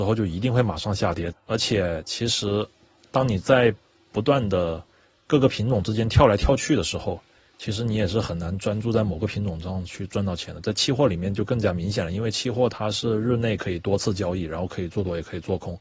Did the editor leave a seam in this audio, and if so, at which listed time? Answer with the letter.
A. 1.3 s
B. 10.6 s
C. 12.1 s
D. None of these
A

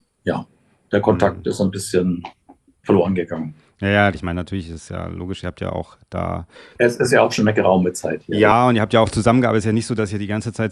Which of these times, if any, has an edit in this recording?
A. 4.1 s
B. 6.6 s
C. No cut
A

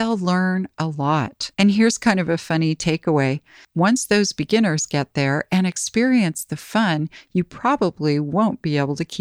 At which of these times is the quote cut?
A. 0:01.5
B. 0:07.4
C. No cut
A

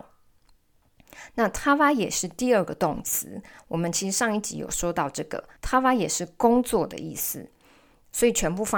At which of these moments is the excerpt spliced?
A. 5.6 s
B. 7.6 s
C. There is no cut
A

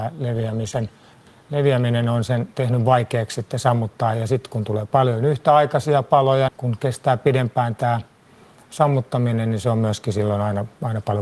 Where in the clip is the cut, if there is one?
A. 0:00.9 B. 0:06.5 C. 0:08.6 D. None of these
B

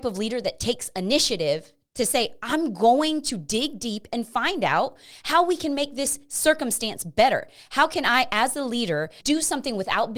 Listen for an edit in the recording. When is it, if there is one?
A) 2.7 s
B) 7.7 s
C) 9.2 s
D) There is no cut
C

